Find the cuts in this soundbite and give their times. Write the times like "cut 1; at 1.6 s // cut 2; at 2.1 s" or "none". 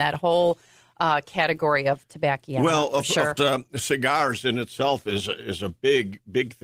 cut 1; at 3.4 s